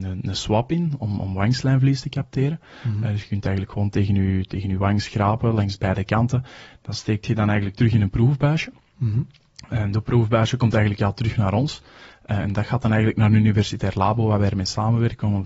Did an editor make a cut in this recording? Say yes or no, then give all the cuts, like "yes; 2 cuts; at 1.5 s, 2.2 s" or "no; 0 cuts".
no; 0 cuts